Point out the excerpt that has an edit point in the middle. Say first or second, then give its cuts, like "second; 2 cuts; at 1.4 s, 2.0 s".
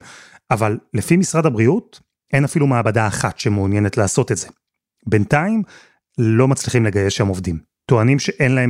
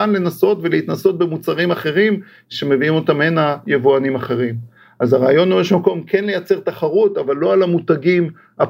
first; 1 cut; at 5.0 s